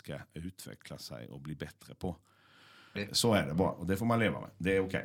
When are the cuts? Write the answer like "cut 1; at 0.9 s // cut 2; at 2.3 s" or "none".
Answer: cut 1; at 2.9 s